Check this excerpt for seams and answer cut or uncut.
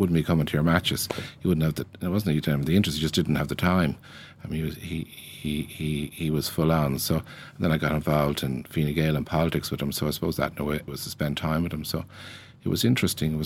cut